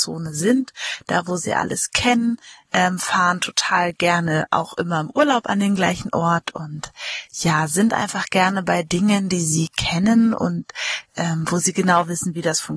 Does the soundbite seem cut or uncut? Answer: uncut